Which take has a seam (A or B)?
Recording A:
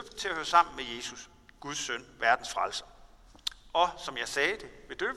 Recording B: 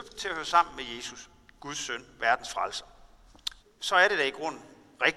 B